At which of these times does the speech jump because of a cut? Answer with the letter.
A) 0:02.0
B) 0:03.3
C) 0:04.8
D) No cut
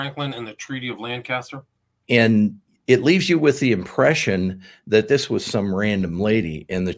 A